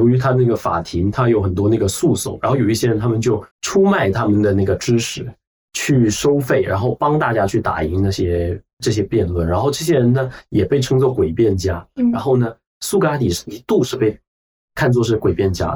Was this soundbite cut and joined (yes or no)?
yes